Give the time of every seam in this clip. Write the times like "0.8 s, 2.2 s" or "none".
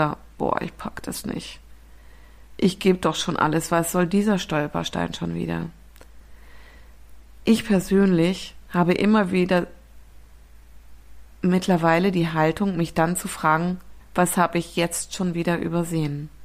14.0 s